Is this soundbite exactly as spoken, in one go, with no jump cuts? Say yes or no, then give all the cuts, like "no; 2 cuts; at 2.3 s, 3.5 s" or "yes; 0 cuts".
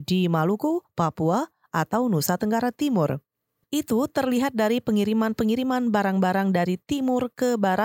yes; 0 cuts